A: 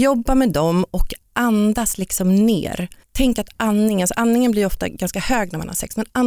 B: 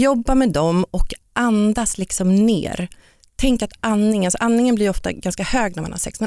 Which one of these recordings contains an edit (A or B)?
A